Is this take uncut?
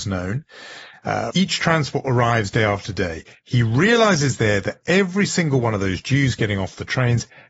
no; 1 cut; at 1.3 s

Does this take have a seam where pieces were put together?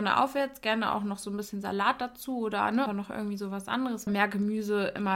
yes; 2 cuts; at 2.9 s, 4.1 s

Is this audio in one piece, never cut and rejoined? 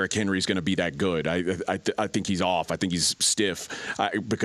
yes; 0 cuts

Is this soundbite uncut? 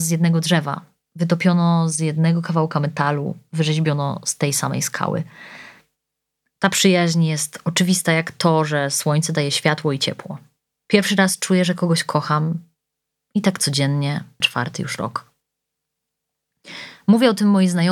no; 2 cuts; at 10.8 s, 14.4 s

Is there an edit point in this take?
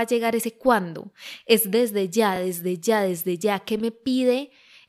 no; 0 cuts

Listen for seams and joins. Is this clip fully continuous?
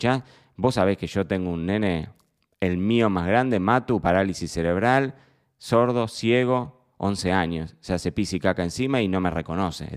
yes; 0 cuts

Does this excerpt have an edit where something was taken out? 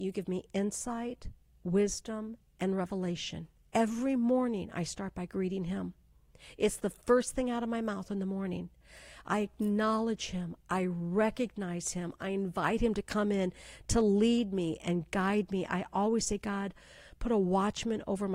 no; 0 cuts

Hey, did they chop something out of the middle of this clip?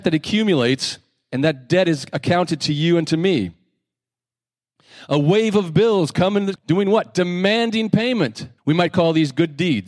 yes; 2 cuts; at 6.6 s, 8.6 s

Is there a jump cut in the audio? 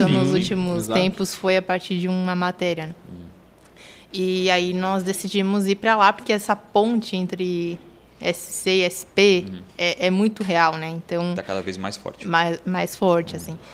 no; 0 cuts

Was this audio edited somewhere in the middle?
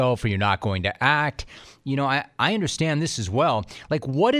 no; 0 cuts

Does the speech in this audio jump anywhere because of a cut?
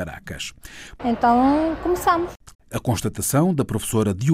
yes; 2 cuts; at 1.0 s, 2.5 s

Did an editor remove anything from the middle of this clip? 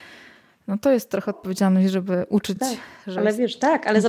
no; 0 cuts

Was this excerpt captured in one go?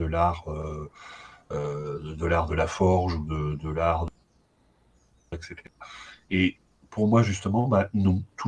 yes; 0 cuts

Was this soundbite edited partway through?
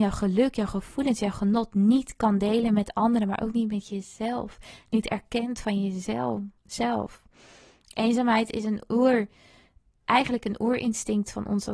yes; 1 cut; at 6.6 s

